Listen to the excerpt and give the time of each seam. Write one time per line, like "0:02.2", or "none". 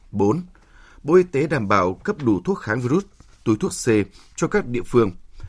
none